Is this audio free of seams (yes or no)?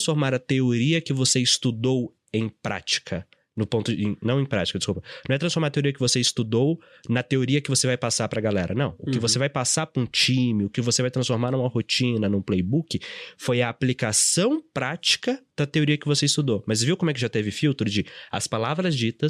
yes